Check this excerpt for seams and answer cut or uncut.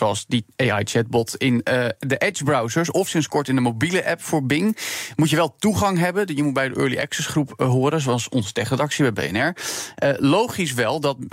uncut